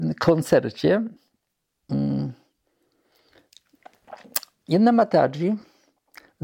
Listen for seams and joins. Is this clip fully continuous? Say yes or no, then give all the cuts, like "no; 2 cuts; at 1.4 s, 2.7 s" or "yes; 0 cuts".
yes; 0 cuts